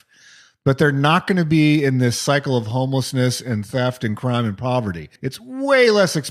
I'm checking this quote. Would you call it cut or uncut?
cut